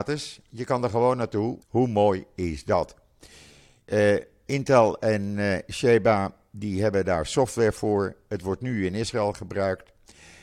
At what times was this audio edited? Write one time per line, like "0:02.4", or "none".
0:01.6